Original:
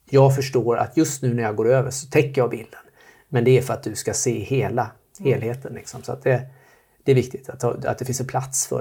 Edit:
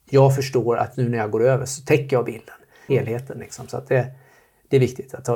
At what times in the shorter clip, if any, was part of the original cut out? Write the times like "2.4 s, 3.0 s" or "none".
0.9 s, 2.9 s

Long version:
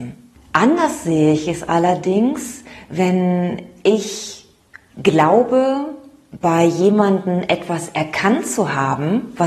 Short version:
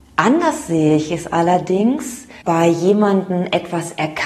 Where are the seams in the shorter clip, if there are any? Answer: 2.4 s

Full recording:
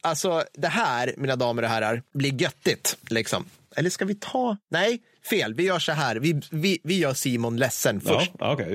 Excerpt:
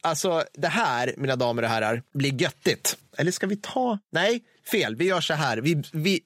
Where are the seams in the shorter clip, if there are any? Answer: 3.0 s

